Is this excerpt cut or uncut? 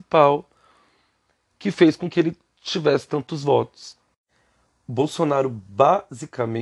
uncut